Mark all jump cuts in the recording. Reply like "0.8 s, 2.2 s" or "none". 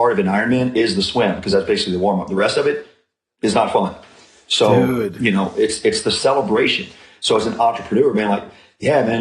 none